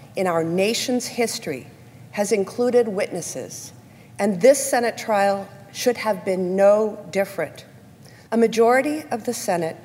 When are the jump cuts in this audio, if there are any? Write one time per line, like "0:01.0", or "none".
0:08.3